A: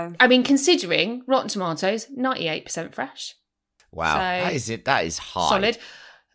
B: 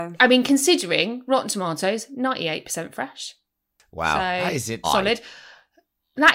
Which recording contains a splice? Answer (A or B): B